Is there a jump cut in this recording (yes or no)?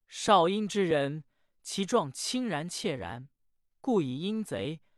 no